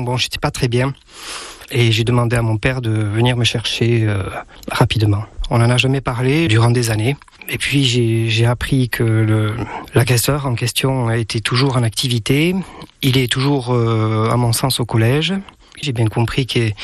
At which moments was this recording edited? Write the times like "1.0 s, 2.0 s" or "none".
6.5 s, 15.8 s